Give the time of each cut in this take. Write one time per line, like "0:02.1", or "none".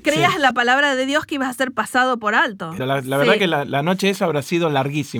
0:02.8